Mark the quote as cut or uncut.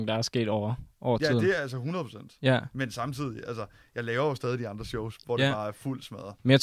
uncut